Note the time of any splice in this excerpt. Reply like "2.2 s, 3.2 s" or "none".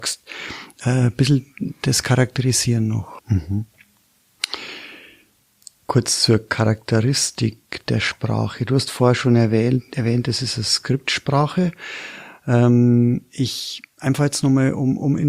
3.2 s